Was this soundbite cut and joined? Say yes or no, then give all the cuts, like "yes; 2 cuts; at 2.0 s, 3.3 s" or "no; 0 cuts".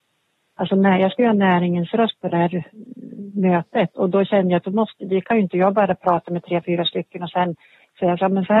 no; 0 cuts